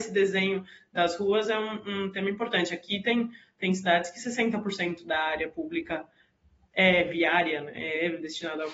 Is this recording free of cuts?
yes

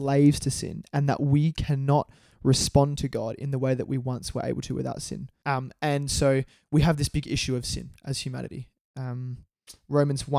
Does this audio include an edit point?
yes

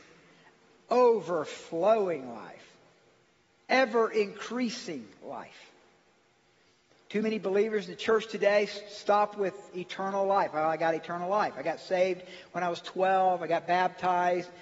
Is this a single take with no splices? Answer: yes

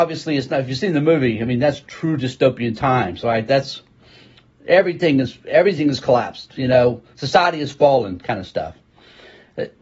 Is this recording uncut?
yes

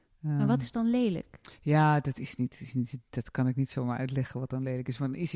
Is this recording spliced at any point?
no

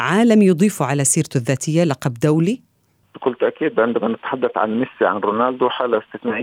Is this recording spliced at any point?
no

